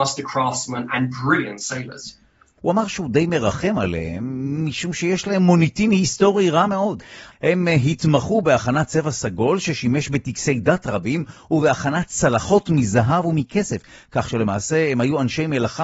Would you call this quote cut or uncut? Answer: cut